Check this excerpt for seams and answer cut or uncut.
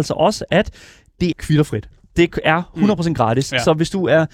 cut